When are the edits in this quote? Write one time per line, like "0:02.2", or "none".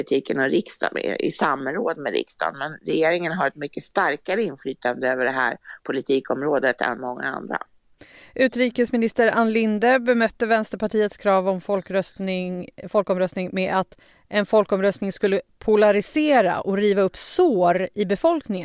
none

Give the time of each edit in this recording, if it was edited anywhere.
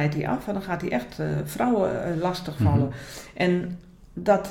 none

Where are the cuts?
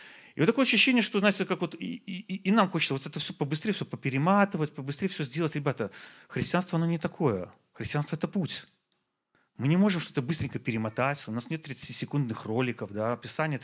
none

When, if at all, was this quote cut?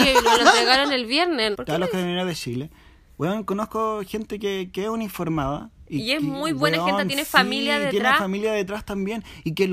0:01.5

